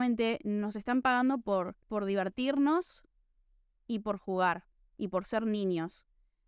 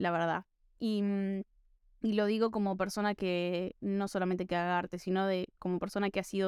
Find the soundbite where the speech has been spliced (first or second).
first